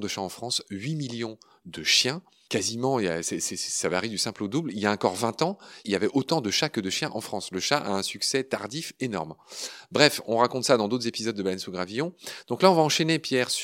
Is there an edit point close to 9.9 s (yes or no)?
no